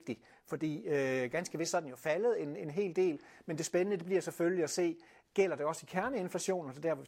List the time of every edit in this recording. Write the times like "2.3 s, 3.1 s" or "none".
none